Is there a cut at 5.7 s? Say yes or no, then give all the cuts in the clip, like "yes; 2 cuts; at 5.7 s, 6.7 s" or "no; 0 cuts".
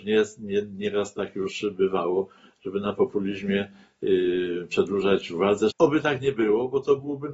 yes; 1 cut; at 5.7 s